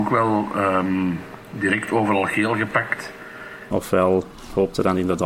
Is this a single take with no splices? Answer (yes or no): no